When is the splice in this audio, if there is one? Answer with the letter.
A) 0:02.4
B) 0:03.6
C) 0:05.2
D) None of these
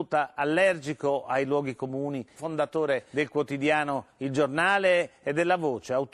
A